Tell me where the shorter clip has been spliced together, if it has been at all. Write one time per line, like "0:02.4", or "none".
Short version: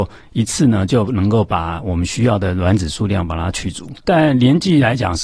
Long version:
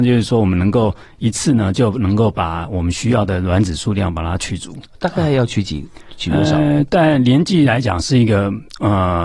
0:04.1